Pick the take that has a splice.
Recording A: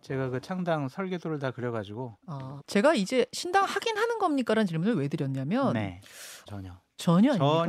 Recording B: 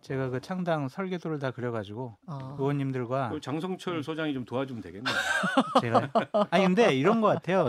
A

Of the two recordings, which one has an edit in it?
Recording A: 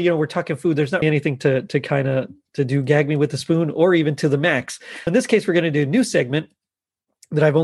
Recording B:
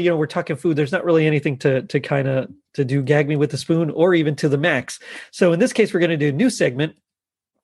A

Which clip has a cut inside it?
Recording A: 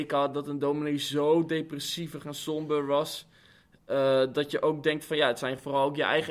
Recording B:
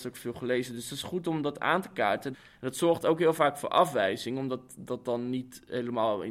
B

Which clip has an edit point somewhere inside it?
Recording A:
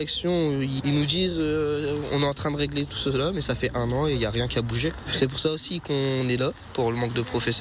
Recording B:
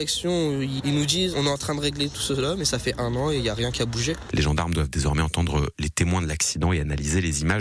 B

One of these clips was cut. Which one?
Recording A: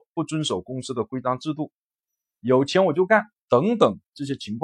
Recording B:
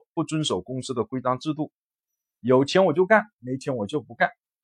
A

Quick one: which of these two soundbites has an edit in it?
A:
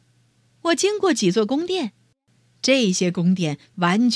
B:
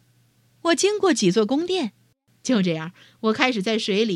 B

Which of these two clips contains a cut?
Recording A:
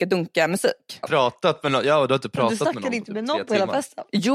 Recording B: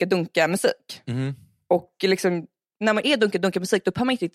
A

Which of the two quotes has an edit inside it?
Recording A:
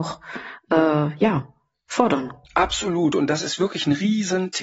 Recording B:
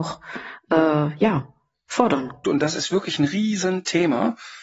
B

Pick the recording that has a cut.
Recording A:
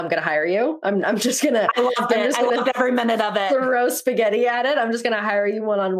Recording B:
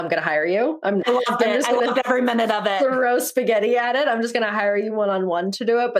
B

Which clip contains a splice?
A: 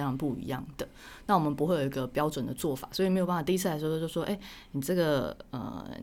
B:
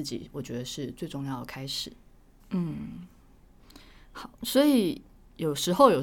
B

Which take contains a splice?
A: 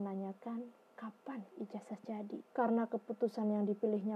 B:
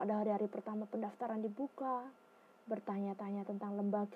A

